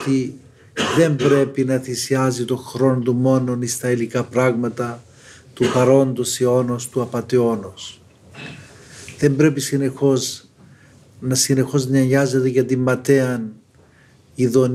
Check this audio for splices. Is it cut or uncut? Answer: uncut